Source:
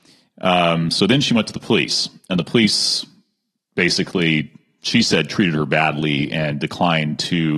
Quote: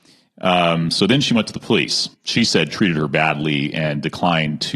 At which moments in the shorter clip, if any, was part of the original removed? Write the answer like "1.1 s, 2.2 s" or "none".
2.1 s